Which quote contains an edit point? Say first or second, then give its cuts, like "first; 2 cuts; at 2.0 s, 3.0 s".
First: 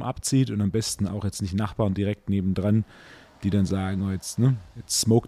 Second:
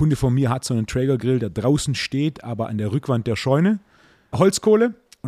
second; 1 cut; at 4.3 s